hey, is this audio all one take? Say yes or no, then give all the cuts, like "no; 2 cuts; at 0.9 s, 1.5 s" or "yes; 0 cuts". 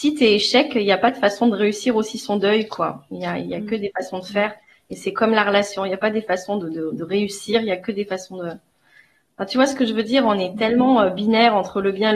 yes; 0 cuts